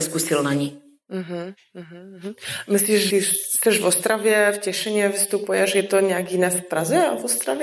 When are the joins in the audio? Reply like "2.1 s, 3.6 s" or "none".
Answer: 3.1 s